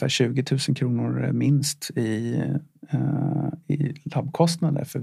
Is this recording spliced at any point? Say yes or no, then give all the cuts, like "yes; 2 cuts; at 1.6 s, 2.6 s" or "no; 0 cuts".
no; 0 cuts